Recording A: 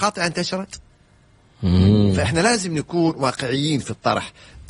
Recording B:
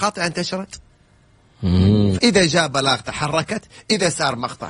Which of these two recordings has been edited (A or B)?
B